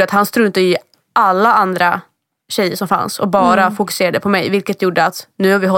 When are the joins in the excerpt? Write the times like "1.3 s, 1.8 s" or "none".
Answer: none